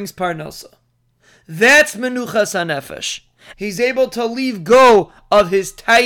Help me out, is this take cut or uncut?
cut